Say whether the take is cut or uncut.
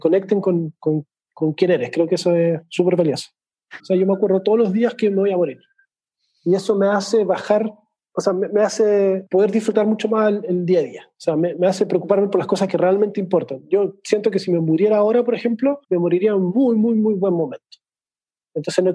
cut